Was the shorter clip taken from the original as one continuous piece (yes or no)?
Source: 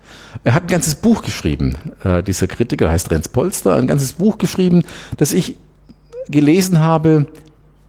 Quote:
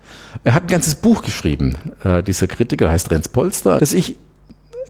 no